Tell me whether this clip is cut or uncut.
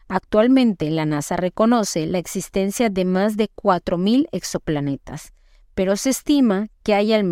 uncut